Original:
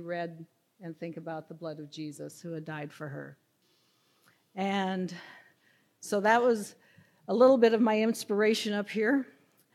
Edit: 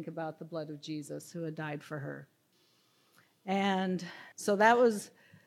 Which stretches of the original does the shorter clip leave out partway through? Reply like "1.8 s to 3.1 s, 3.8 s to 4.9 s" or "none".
5.4 s to 6.0 s

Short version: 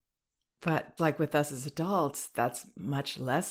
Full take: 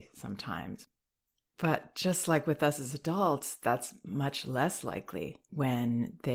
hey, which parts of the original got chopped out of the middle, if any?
1.9 s to 2.3 s

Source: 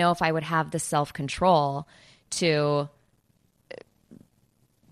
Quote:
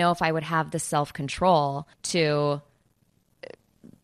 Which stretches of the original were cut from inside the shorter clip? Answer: 1.9 s to 2.2 s

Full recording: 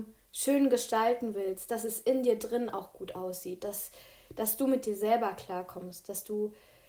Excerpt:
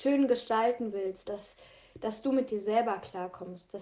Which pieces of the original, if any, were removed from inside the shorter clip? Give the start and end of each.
1.7 s to 3.6 s

